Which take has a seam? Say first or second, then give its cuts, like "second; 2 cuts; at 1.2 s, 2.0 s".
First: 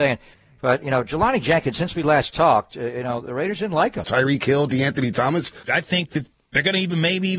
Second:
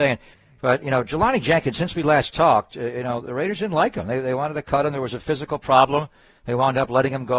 first; 2 cuts; at 4.0 s, 5.6 s